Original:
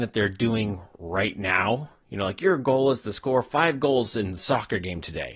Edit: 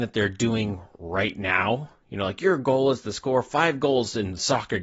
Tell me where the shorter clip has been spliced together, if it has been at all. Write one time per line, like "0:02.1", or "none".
none